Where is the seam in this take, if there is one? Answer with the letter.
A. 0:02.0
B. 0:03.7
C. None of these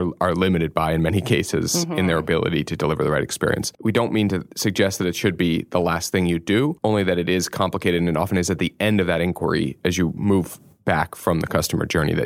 B